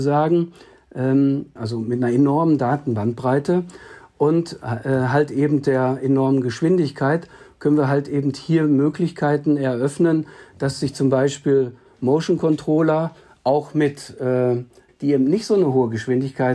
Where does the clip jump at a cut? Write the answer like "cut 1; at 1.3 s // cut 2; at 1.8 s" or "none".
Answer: cut 1; at 1.6 s // cut 2; at 14.9 s